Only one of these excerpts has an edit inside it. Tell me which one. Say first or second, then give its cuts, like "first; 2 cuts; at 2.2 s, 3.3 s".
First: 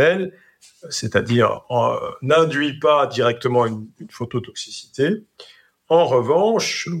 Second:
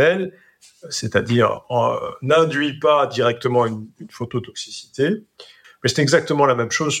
second; 1 cut; at 5.6 s